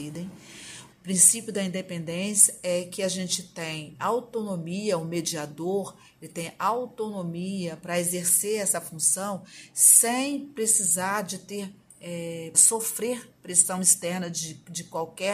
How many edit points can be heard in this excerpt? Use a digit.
2